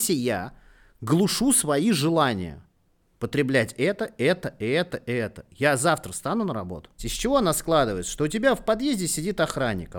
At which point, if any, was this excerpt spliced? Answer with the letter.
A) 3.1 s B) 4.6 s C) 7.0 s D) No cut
C